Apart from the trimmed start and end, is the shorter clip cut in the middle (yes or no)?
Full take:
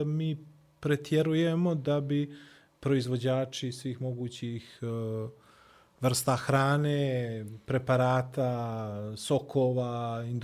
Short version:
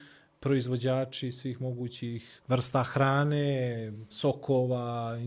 yes